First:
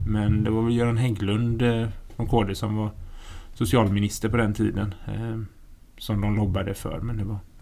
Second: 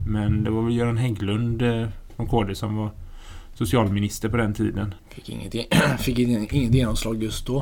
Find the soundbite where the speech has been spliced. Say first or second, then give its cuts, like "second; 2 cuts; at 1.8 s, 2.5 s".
second; 1 cut; at 5.0 s